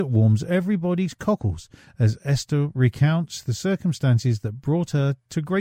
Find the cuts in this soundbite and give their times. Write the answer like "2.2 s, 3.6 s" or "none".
none